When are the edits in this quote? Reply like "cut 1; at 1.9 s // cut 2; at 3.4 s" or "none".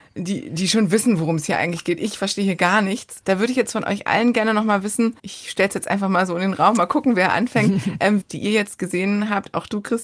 cut 1; at 3.2 s // cut 2; at 5.2 s // cut 3; at 8.2 s